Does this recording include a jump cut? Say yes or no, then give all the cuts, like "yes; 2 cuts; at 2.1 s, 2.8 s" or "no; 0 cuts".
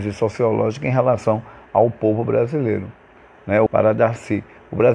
yes; 1 cut; at 3.7 s